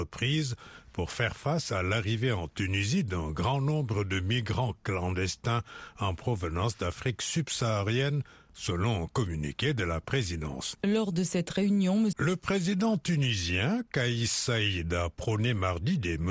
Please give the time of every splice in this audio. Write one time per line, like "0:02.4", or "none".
0:10.7
0:12.1

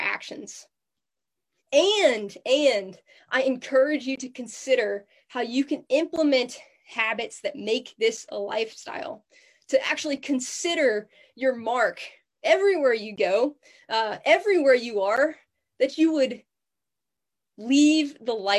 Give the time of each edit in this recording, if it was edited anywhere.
0:01.6

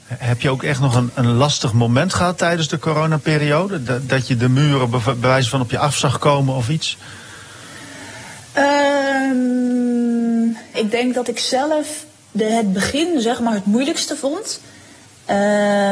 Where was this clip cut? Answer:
0:10.7

